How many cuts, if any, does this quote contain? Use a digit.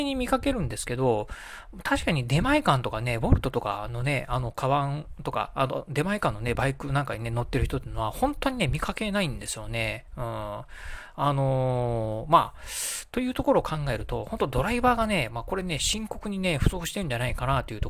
0